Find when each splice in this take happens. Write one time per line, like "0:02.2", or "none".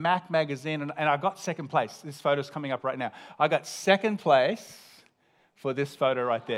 none